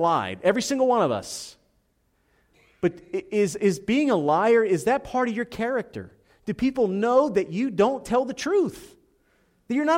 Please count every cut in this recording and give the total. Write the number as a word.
zero